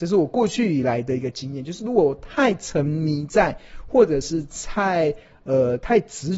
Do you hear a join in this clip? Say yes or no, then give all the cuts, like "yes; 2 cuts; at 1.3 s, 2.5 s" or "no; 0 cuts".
no; 0 cuts